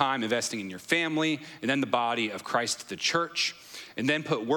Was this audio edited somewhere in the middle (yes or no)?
no